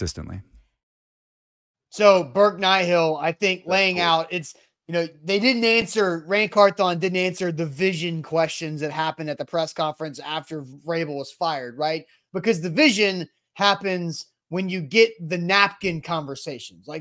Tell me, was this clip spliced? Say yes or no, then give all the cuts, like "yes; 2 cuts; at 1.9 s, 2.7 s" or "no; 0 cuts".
no; 0 cuts